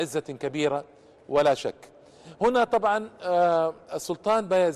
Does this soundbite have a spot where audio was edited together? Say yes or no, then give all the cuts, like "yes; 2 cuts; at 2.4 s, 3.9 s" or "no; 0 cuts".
no; 0 cuts